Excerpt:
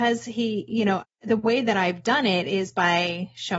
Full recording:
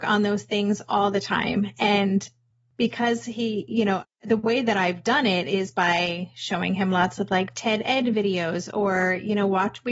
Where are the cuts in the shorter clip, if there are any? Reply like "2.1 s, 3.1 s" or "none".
none